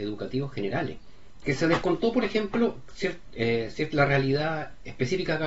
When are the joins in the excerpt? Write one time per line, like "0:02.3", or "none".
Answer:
0:01.4